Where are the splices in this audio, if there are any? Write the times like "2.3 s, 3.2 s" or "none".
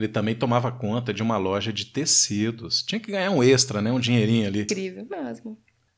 4.7 s